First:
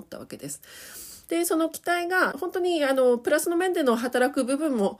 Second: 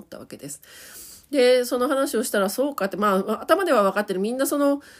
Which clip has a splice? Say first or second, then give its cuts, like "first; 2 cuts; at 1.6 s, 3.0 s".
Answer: first; 2 cuts; at 1.3 s, 2.3 s